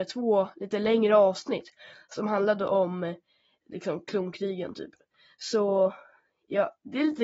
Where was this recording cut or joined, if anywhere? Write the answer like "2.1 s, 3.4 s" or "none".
3.6 s